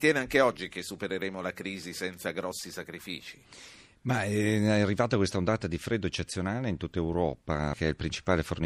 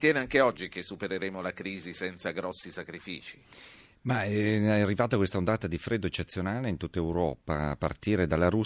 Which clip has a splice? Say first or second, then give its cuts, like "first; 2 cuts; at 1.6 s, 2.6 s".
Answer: first; 1 cut; at 7.7 s